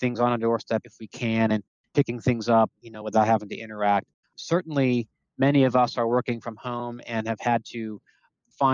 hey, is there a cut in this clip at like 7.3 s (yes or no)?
no